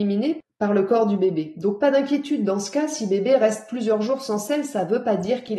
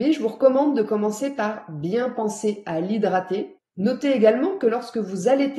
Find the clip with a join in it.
second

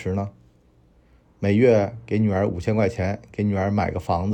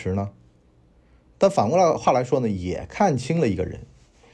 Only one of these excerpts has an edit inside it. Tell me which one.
first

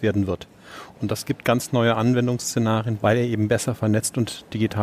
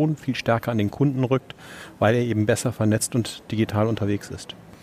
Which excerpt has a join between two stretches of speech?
first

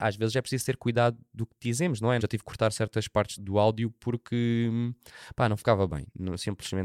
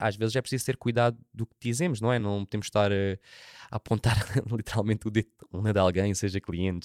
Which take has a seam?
first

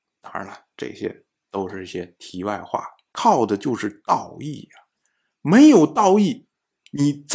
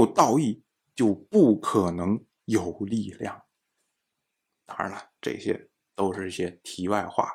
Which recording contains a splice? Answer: first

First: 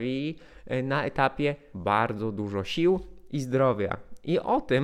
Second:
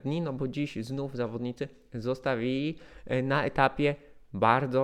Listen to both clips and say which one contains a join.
first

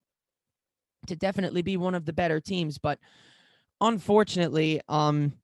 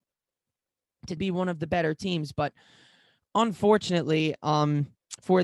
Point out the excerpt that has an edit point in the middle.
second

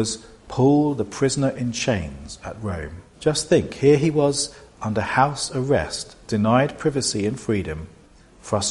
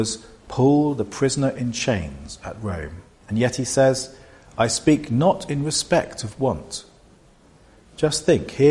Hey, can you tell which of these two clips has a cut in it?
first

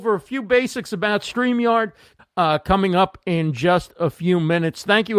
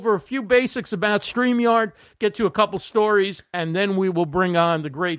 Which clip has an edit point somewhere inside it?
first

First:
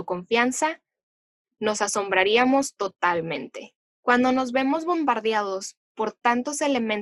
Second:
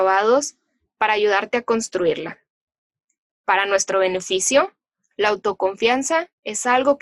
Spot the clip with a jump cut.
second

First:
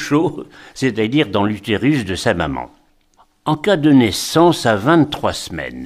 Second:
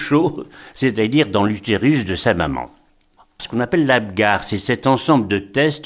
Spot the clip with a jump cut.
second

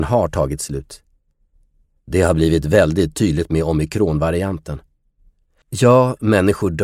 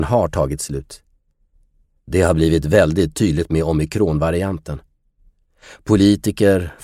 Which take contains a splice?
first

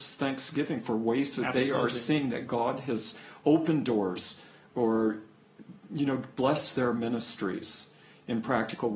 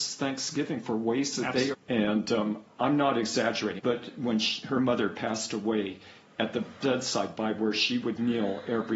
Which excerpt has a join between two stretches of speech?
second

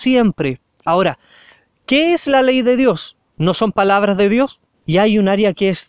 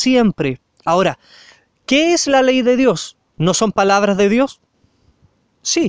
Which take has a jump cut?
first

